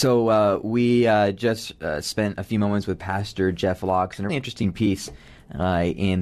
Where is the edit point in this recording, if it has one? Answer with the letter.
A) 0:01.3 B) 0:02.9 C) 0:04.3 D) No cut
C